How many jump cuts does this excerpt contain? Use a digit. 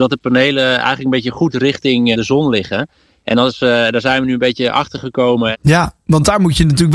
2